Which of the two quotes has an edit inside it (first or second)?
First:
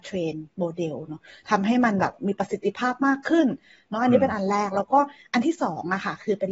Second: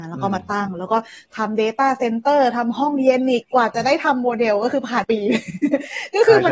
second